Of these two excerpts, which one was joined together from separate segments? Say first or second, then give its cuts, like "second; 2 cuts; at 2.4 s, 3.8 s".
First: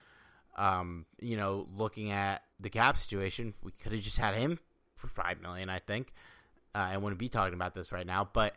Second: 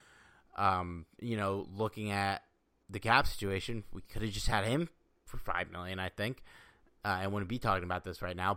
first; 1 cut; at 2.5 s